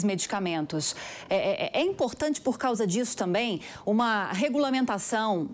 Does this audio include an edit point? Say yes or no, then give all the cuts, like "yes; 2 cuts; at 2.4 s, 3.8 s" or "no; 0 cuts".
no; 0 cuts